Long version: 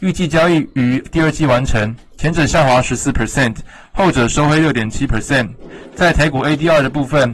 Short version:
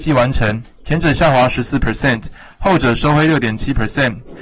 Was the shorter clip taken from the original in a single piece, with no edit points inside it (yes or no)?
yes